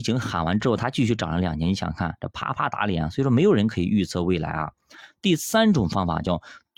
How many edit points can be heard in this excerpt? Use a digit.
0